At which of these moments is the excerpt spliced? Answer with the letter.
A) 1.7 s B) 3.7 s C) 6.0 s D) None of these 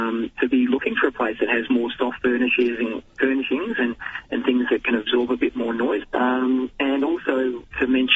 C